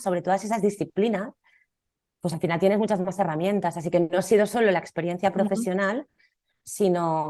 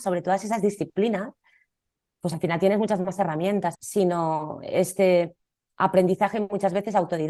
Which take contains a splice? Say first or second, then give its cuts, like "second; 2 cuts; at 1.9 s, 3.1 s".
second; 1 cut; at 3.7 s